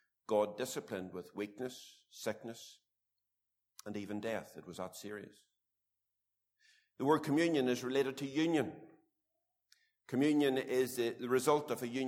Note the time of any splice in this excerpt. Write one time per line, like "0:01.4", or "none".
none